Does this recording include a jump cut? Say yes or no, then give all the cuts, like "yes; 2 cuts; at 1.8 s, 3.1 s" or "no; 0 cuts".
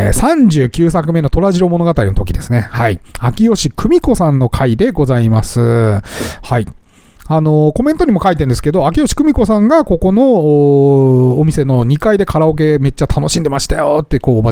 no; 0 cuts